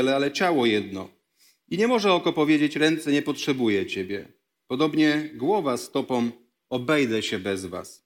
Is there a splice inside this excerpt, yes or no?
no